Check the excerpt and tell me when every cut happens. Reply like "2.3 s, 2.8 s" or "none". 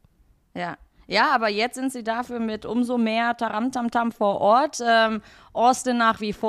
none